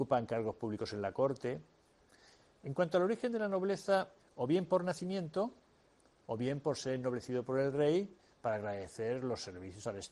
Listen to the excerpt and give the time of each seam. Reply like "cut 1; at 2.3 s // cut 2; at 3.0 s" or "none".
cut 1; at 4.2 s // cut 2; at 6.2 s